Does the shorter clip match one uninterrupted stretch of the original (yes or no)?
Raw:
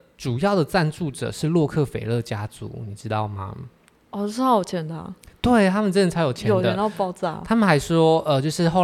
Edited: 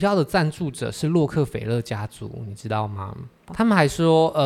no